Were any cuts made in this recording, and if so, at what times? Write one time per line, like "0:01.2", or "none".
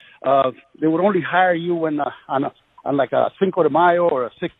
none